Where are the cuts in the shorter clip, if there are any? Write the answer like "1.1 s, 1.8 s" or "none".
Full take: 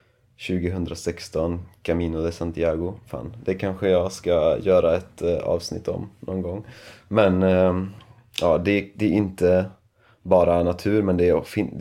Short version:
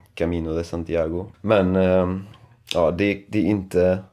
1.3 s